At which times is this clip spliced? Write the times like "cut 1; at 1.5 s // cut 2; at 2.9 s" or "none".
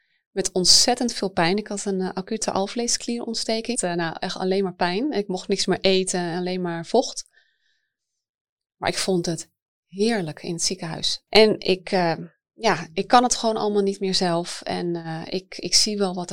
cut 1; at 3.7 s // cut 2; at 11.3 s